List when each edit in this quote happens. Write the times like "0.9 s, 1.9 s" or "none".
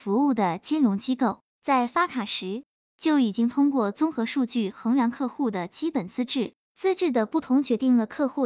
none